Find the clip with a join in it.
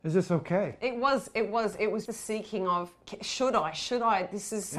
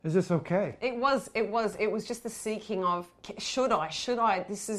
first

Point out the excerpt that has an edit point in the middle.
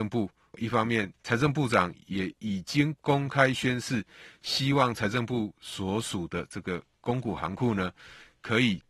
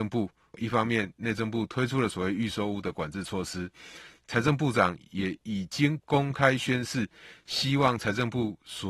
first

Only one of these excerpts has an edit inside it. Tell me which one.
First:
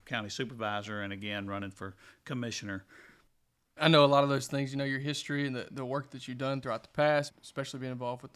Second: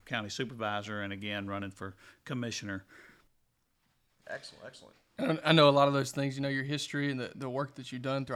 first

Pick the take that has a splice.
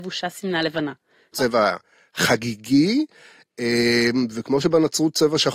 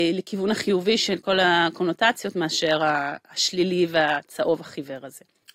first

